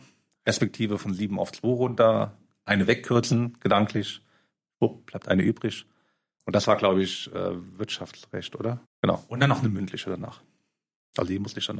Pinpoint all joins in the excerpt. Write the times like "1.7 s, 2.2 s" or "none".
8.8 s

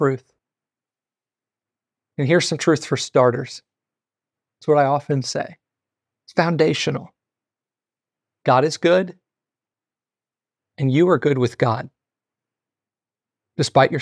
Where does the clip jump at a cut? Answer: none

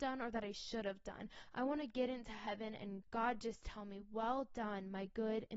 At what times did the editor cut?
3.0 s

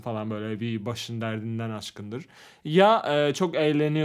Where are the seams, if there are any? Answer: none

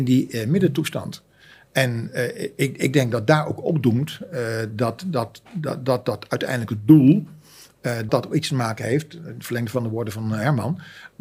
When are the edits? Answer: 8.1 s

